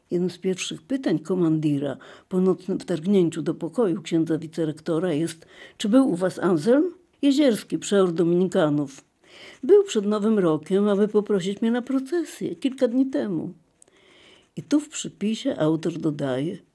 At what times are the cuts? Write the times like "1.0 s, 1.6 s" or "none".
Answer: 7.1 s